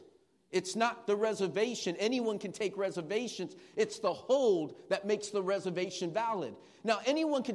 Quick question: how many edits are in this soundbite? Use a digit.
0